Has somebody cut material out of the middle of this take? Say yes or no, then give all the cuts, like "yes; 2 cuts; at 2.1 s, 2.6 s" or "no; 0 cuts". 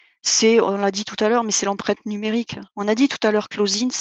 no; 0 cuts